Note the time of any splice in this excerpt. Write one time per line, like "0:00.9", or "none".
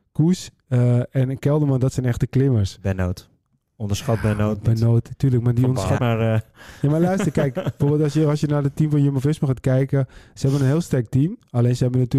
0:06.0